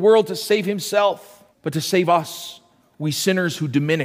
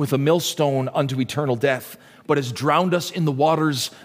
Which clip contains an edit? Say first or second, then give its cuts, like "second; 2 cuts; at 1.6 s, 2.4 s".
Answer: first; 1 cut; at 1.5 s